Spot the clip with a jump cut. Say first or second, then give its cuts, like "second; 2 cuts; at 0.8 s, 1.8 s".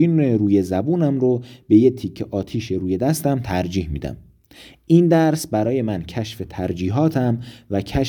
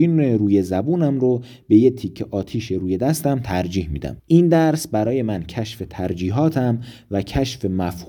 second; 1 cut; at 4.2 s